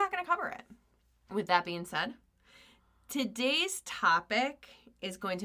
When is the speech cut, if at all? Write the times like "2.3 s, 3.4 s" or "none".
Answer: 1.3 s

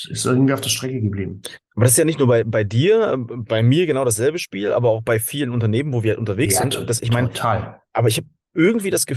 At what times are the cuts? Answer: none

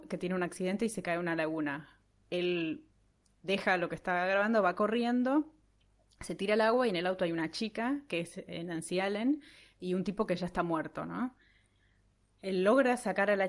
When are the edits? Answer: none

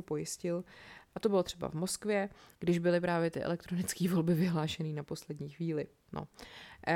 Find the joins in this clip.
1.1 s, 2.5 s

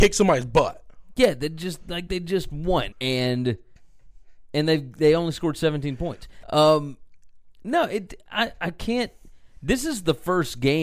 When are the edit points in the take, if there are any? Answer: 2.9 s, 6.4 s

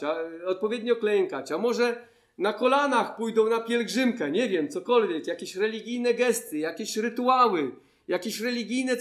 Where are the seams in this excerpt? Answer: none

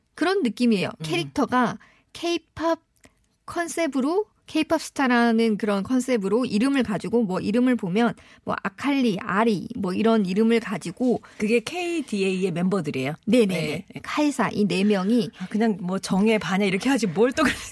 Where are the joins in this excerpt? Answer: 1.0 s, 14.0 s

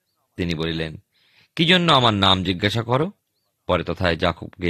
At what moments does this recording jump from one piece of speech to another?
none

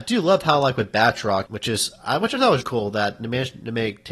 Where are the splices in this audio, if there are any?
1.5 s, 2.6 s

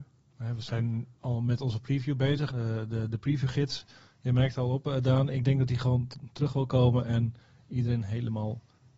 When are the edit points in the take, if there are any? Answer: 2.5 s

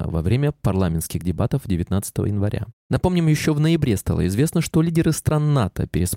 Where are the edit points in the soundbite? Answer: none

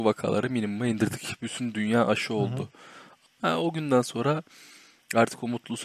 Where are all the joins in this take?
3.2 s

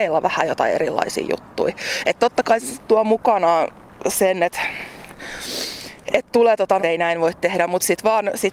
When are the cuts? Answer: 6.8 s

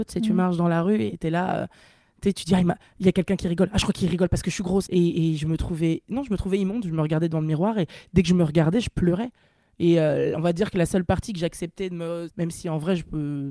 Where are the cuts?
4.9 s, 12.3 s

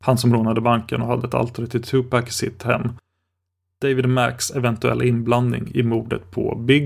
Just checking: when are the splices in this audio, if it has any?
none

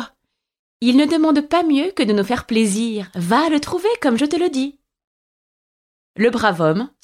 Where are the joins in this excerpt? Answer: none

